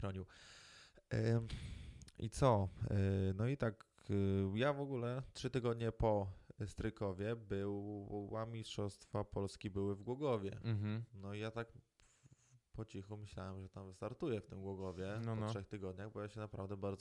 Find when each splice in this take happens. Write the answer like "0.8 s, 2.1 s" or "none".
none